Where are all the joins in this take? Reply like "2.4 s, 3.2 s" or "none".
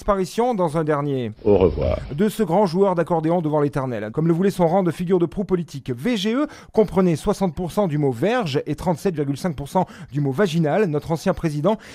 4.1 s